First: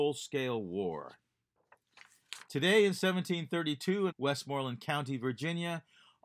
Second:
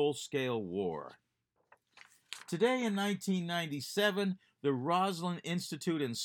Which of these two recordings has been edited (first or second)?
first